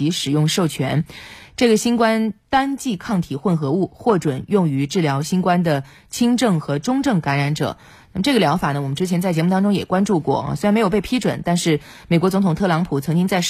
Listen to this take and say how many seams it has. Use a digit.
0